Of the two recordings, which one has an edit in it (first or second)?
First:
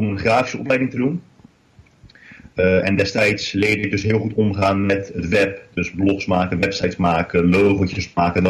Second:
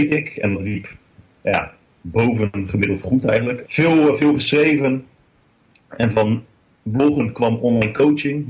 second